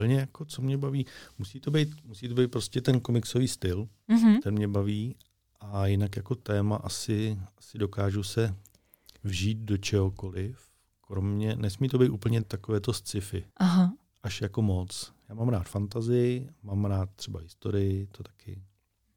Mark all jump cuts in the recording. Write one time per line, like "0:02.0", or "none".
0:12.4
0:13.5